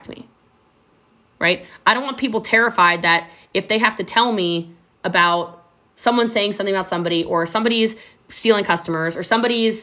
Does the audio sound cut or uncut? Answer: uncut